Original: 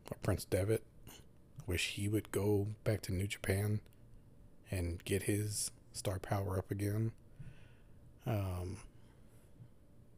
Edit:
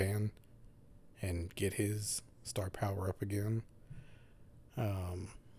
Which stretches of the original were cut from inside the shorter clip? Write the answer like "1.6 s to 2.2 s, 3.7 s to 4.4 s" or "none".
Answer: none